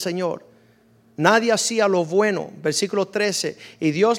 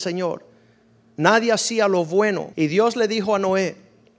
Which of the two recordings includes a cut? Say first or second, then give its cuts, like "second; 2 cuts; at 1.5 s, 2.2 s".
second; 1 cut; at 2.5 s